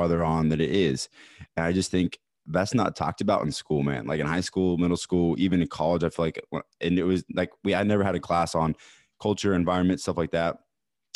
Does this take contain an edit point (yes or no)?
no